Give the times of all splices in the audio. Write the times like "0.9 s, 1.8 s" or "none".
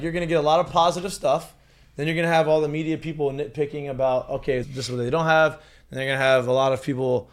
4.6 s

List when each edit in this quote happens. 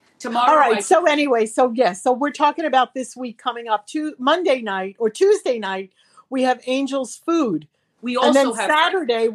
8.0 s

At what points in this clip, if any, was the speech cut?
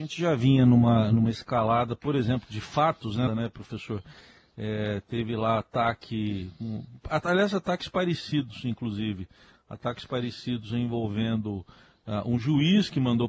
3.3 s

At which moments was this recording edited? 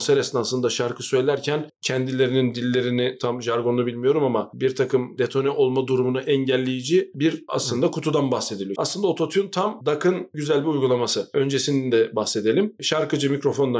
8.7 s

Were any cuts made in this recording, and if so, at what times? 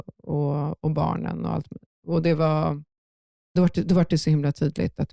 none

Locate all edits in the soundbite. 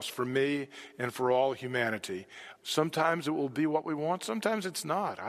2.6 s

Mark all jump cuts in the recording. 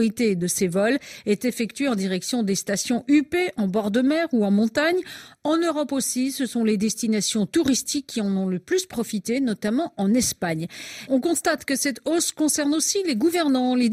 11.1 s

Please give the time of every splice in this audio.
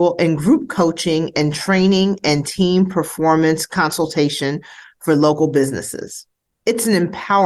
6.5 s

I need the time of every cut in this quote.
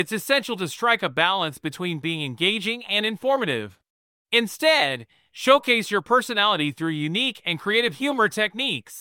4.2 s

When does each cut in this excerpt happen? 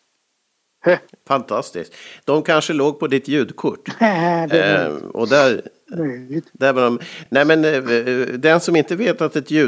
none

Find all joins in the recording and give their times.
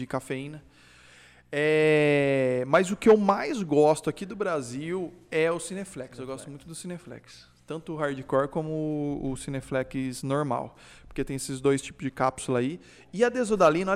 none

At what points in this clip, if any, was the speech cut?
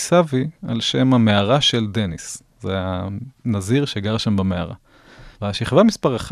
5.4 s

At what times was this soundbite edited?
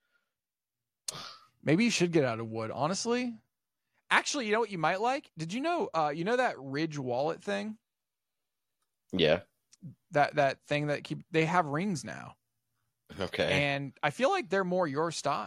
none

